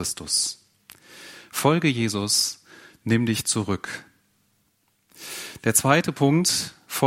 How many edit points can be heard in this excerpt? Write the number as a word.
zero